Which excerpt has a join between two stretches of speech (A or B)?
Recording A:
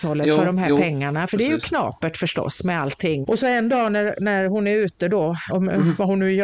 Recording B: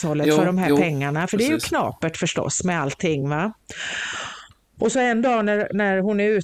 A